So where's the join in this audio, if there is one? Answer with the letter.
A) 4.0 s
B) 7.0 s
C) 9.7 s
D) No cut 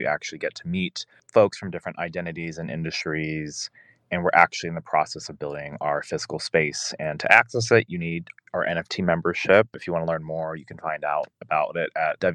D